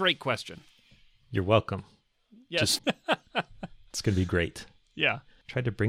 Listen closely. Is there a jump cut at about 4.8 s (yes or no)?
no